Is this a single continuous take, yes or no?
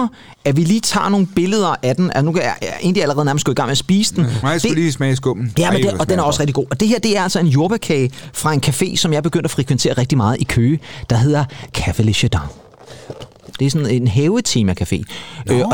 yes